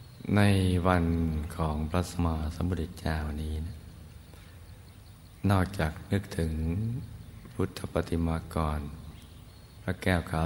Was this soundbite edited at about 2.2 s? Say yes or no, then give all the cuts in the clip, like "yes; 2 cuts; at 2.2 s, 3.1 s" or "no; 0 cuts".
yes; 1 cut; at 2.2 s